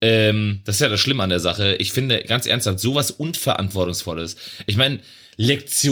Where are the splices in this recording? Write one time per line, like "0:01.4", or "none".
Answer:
none